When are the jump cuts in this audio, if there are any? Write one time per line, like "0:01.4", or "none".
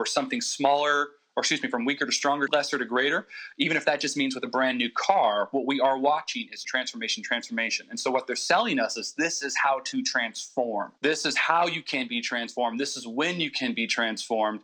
0:02.5
0:06.6
0:11.0